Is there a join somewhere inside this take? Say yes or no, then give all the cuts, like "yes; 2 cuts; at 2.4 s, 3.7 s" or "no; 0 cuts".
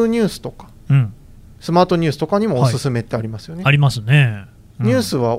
no; 0 cuts